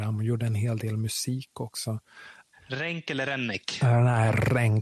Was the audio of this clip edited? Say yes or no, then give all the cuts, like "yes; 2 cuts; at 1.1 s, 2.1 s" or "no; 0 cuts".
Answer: yes; 1 cut; at 2.5 s